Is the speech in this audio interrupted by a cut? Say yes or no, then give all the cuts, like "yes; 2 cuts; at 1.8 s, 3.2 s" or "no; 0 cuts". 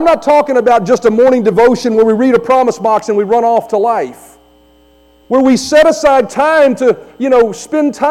yes; 1 cut; at 5.2 s